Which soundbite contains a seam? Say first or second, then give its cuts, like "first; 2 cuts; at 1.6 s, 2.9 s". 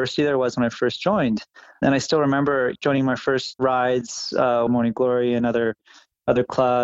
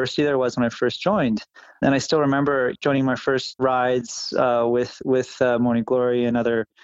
first; 1 cut; at 4.7 s